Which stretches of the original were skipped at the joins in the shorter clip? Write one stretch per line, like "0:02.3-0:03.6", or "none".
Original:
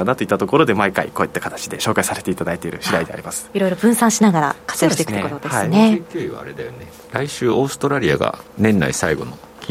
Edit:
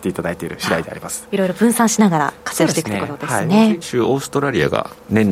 0:06.0-0:07.3